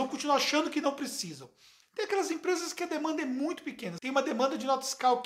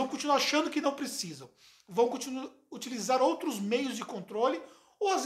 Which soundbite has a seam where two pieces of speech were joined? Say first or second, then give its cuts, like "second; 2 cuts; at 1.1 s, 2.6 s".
first; 2 cuts; at 1.8 s, 4.0 s